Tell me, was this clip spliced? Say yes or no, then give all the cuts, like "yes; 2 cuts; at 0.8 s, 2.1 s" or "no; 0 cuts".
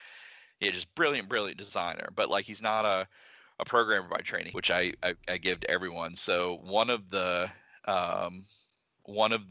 yes; 1 cut; at 4.5 s